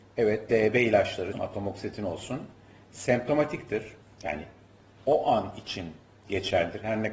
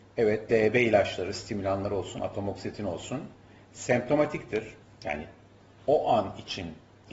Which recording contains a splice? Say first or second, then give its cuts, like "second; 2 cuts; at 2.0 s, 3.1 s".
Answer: first; 1 cut; at 1.3 s